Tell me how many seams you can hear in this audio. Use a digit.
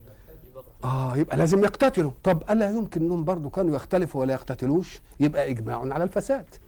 1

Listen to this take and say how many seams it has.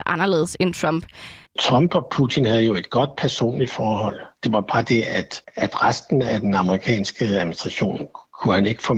1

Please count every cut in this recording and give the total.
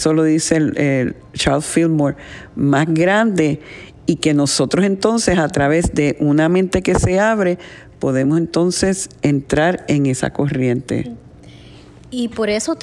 0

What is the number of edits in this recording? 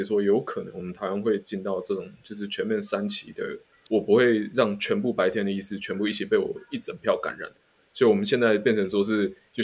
1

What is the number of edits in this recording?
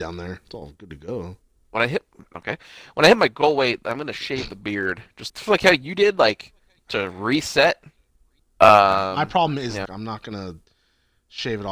3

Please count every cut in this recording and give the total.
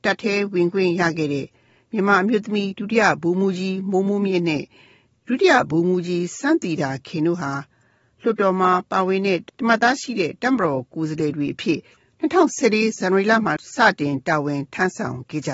0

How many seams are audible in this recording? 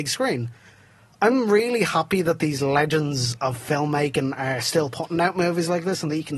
1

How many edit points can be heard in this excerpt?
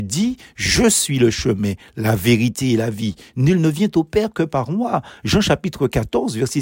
0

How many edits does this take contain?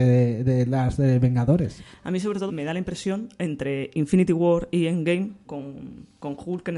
2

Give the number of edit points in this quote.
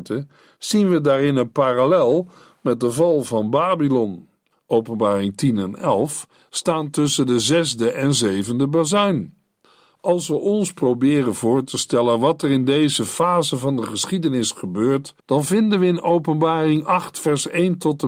2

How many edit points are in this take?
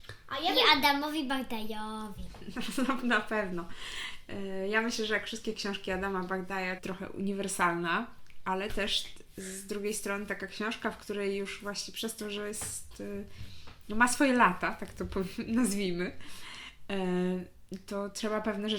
1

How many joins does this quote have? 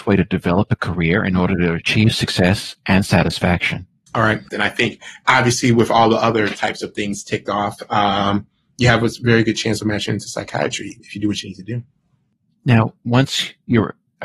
1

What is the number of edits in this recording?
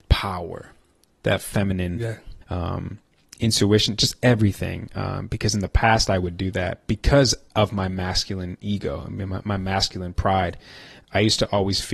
1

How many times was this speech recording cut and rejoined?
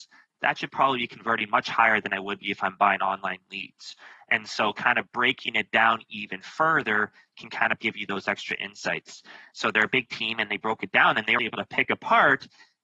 2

